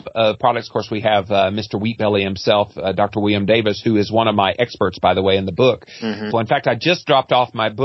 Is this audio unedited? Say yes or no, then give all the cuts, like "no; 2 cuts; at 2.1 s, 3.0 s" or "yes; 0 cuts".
no; 1 cut; at 6.3 s